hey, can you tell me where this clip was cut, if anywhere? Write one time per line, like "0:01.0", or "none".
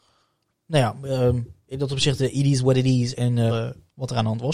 0:03.5